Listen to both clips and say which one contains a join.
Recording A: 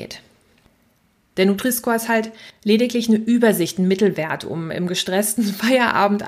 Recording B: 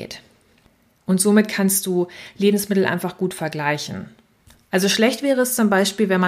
B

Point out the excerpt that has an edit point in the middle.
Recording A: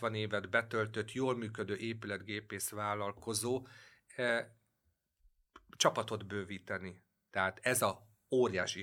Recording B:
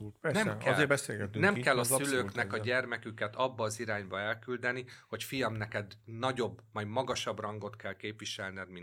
A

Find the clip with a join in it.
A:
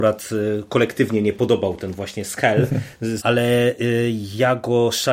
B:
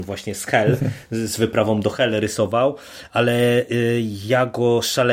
A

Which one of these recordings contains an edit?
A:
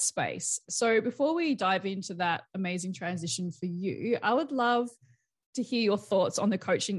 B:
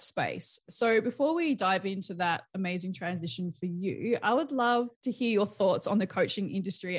B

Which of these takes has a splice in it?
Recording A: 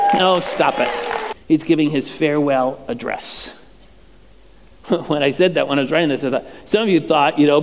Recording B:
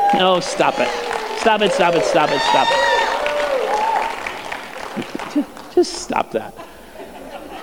A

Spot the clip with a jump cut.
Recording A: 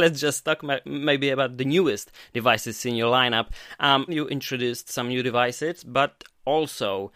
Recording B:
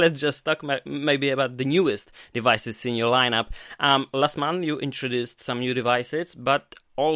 A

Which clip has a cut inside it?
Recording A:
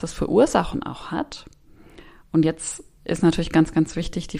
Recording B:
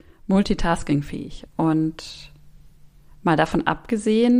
B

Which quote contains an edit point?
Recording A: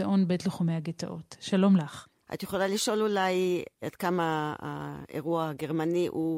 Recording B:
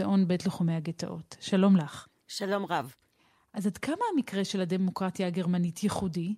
A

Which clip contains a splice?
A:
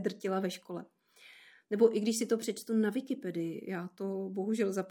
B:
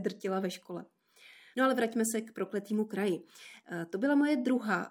B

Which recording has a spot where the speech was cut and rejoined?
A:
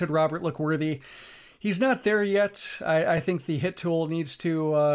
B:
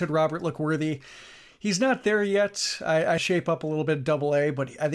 B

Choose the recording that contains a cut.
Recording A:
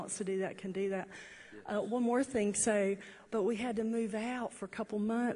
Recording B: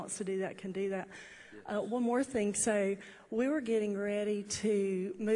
A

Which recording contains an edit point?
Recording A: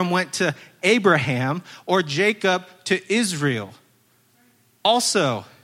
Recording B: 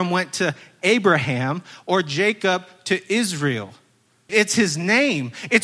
B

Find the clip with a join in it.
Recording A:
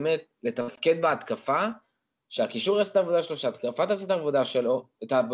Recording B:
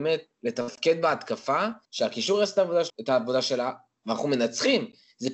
B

